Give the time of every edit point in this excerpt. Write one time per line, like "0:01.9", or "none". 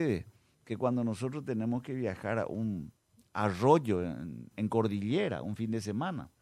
0:04.5